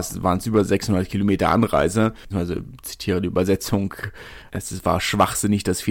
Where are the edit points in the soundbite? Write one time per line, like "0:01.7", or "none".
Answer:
0:02.3
0:04.5